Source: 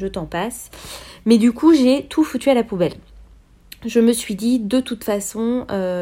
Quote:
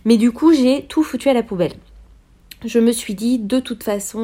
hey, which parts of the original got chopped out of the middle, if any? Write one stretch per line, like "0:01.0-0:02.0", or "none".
none